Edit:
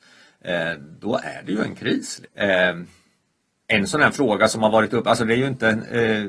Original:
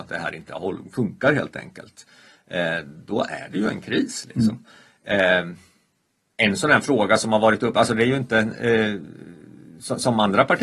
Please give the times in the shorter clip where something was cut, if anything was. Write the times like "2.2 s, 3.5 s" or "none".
2.2 s